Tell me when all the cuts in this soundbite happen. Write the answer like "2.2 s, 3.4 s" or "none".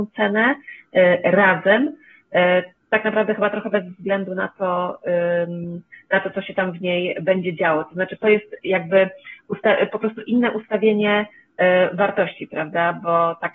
none